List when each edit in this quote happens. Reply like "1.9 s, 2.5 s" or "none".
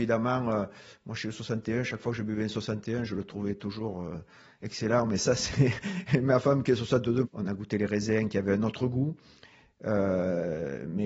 7.2 s